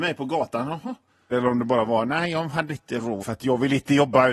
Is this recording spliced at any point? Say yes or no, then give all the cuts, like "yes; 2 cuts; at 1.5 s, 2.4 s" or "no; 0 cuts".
yes; 2 cuts; at 1.3 s, 3.2 s